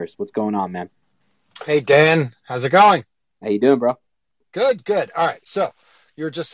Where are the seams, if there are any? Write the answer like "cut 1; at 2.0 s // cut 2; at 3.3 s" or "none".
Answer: none